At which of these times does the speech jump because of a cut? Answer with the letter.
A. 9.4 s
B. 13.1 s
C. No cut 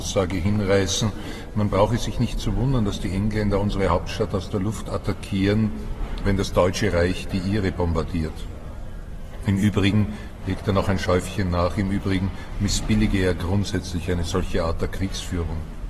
C